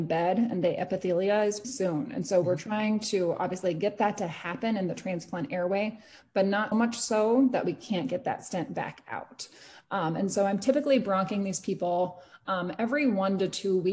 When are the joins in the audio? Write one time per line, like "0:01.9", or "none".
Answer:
0:01.6
0:06.7